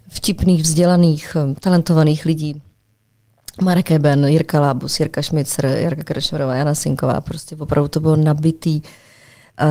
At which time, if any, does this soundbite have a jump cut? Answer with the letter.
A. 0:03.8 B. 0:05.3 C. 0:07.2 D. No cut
D